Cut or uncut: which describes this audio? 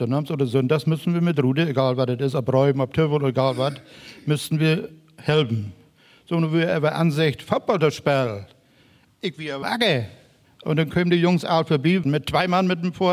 cut